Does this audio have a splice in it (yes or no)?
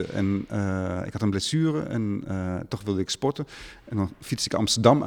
no